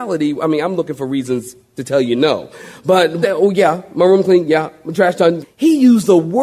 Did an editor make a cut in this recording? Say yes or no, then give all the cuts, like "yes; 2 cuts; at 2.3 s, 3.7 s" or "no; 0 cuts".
yes; 2 cuts; at 3.2 s, 5.4 s